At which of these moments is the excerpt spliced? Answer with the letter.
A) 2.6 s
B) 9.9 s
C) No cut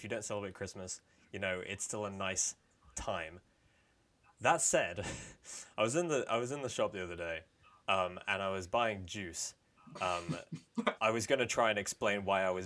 C